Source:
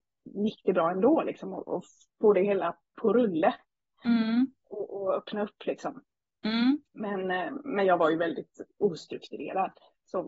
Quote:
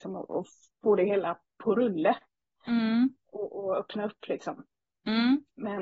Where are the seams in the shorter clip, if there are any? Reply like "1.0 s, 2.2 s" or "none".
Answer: none